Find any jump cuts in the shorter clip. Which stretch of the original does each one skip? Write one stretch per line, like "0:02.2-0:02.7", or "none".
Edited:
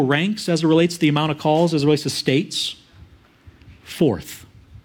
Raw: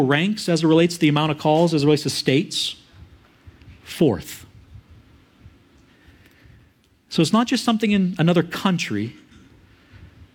none